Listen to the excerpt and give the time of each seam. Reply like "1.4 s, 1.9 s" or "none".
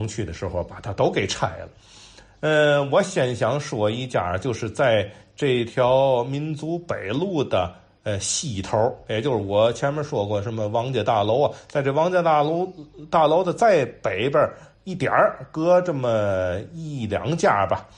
none